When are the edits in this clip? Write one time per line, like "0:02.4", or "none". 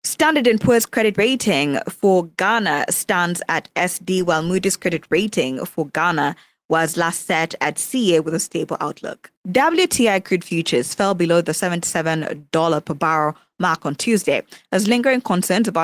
0:09.4